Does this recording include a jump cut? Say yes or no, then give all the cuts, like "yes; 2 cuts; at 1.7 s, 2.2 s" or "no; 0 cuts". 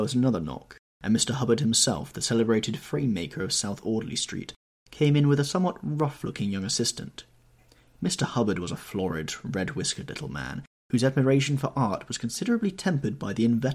no; 0 cuts